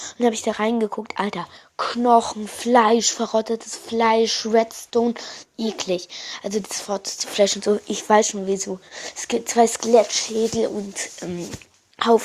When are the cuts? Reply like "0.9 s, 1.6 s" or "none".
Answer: none